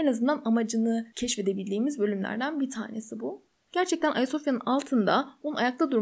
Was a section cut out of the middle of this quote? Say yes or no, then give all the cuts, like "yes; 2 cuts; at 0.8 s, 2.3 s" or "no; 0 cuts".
yes; 1 cut; at 3.7 s